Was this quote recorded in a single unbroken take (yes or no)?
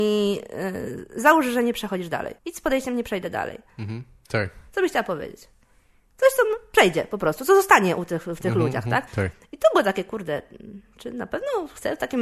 no